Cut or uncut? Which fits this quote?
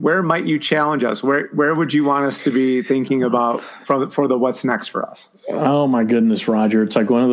uncut